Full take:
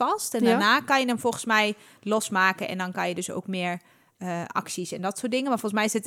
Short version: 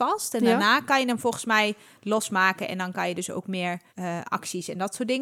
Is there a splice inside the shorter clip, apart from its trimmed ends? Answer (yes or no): yes